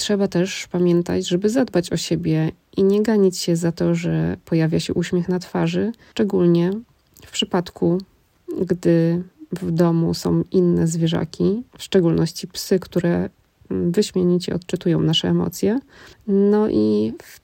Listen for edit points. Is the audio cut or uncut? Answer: uncut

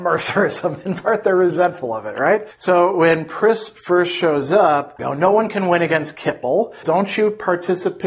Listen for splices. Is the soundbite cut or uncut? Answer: cut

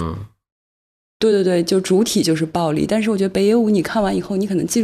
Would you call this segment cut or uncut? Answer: uncut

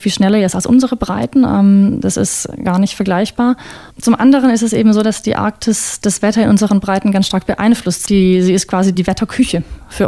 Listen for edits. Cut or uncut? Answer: cut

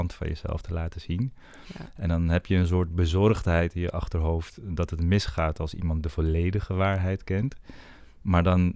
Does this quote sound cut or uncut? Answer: uncut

